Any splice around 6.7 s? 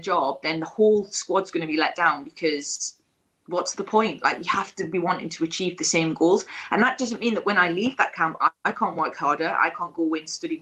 no; 0 cuts

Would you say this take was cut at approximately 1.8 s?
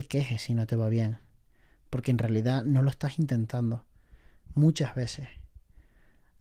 no; 1 cut; at 4.4 s

